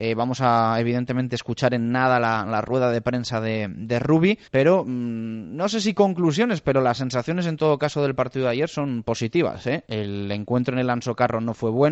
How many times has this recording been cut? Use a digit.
2